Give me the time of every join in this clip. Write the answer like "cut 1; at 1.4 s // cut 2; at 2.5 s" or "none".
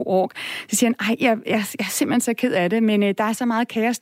none